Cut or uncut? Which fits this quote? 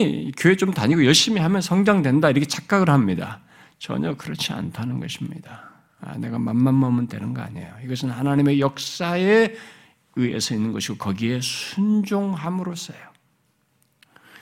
uncut